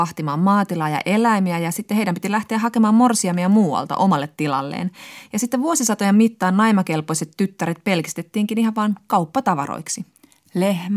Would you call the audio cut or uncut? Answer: uncut